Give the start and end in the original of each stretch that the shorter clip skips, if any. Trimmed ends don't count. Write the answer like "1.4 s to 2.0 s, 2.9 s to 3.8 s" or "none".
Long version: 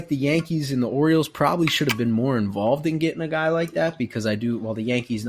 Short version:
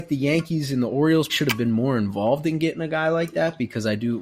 1.3 s to 1.7 s

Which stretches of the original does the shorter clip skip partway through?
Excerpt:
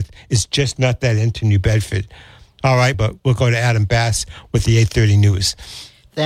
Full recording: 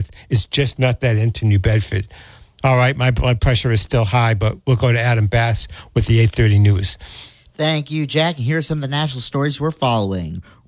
2.9 s to 4.4 s

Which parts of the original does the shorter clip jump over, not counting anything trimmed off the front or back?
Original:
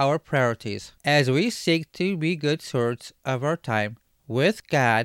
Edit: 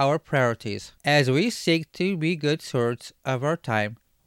none

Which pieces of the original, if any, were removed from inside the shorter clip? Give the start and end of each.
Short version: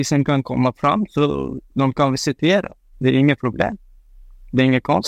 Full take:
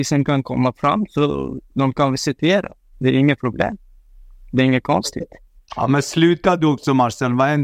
none

